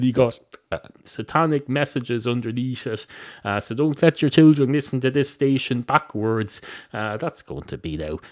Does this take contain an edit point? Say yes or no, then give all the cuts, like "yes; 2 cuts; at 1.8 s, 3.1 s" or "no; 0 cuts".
no; 0 cuts